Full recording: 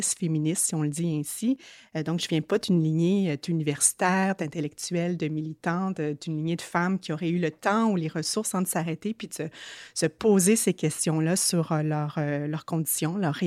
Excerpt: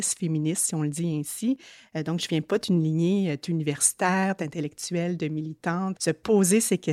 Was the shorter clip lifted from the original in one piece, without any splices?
no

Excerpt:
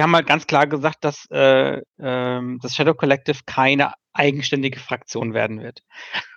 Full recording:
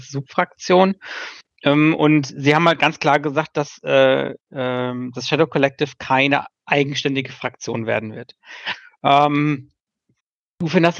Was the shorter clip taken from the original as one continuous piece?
yes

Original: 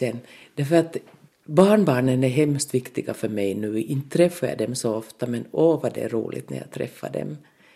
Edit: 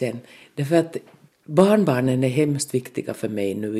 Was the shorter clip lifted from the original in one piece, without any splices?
yes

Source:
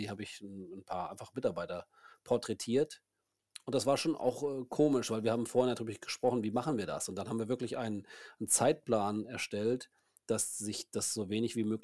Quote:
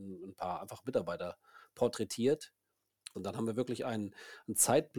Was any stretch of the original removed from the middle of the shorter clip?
yes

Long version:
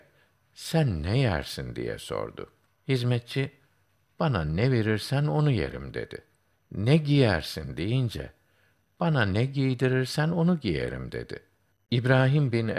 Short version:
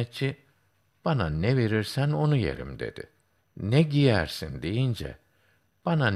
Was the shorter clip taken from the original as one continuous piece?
yes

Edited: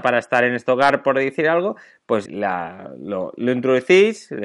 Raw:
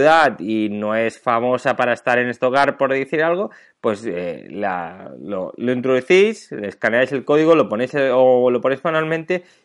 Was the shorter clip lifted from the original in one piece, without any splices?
no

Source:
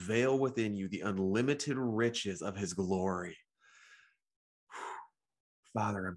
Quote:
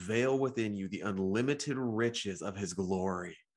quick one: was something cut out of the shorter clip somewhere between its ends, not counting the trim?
no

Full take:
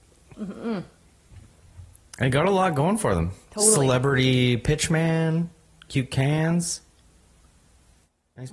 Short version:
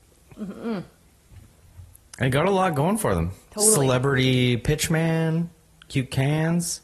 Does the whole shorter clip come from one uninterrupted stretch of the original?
yes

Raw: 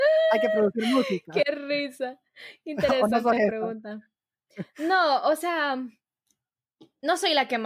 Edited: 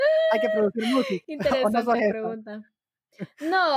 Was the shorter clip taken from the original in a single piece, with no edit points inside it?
no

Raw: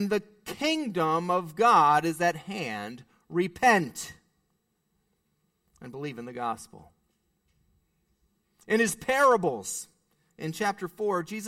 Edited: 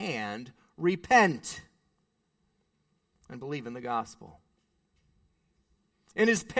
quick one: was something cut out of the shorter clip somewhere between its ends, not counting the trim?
no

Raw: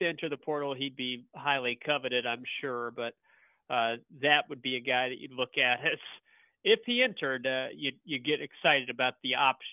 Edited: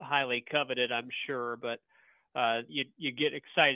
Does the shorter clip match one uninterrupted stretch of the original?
no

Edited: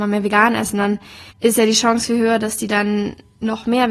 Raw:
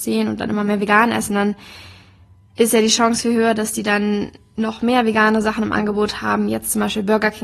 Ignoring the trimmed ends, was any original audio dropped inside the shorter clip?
yes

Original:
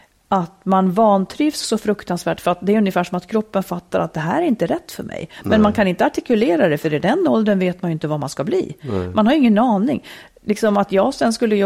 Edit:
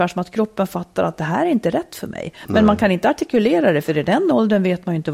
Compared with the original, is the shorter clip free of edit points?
yes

